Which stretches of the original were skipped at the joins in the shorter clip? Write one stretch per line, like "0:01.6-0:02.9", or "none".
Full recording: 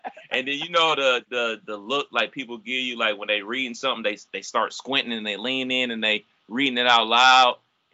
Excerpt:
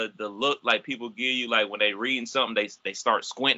none